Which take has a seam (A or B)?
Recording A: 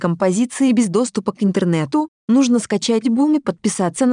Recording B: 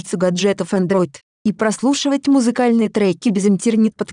B